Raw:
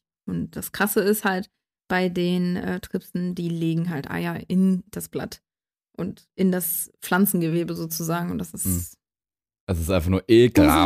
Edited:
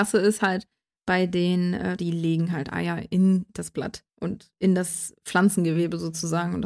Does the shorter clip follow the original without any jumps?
no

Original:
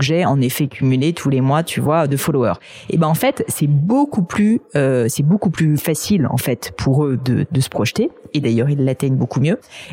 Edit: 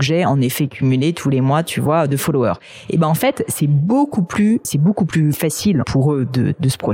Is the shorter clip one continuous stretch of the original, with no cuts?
no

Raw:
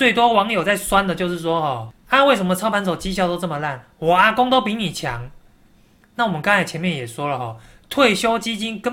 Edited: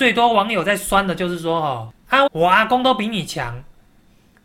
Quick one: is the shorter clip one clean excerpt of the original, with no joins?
no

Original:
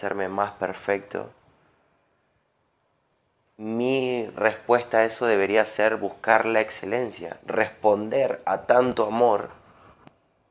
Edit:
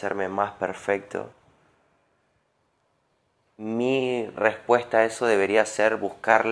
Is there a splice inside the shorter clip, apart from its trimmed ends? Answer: no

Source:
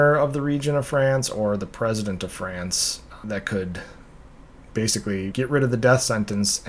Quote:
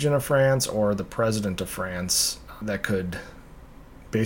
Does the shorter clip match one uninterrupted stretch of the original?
yes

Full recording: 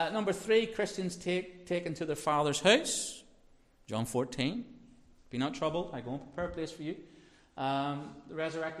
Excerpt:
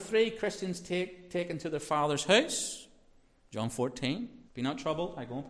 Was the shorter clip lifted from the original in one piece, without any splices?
no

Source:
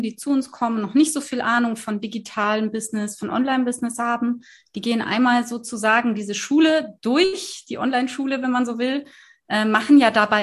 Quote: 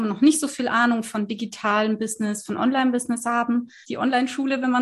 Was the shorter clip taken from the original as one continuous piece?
no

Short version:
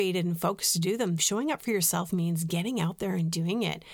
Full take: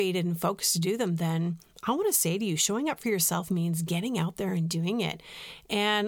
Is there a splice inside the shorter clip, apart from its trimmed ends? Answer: yes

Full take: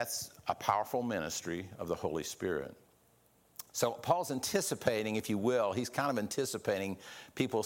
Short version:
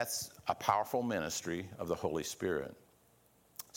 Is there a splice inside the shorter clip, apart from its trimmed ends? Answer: no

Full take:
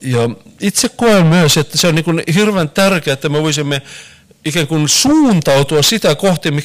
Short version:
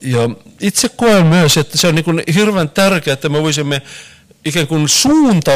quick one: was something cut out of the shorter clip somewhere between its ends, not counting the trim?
no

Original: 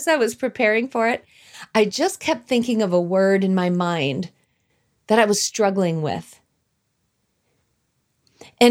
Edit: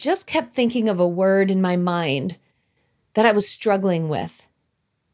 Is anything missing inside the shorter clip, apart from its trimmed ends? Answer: no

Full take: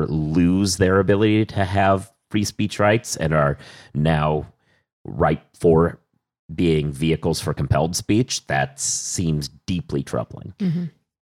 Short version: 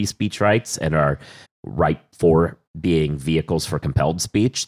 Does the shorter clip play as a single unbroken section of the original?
no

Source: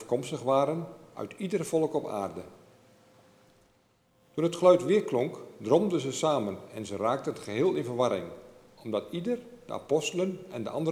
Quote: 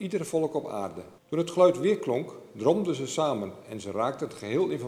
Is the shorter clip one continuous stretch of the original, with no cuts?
no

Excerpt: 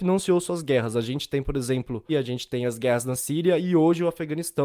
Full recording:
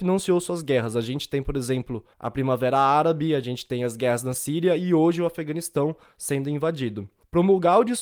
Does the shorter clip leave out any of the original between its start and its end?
yes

